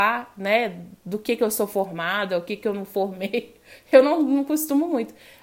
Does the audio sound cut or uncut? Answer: uncut